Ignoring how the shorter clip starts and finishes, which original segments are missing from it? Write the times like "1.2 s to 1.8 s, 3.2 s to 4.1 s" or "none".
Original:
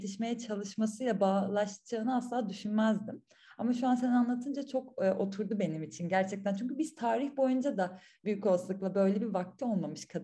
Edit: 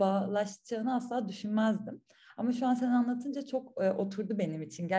none